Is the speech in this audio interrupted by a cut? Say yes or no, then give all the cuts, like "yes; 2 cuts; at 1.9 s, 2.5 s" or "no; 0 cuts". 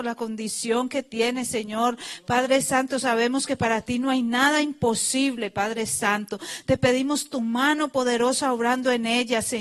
no; 0 cuts